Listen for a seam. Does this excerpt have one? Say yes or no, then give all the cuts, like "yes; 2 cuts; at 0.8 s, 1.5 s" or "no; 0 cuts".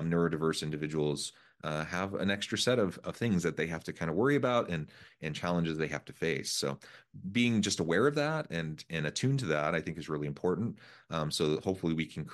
no; 0 cuts